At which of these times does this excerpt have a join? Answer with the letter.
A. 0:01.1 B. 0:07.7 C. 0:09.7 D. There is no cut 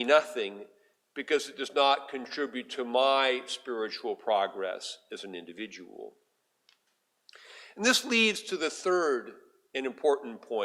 D